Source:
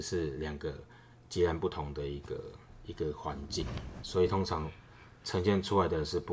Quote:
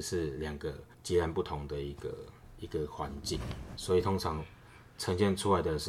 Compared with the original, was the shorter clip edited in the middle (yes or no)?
yes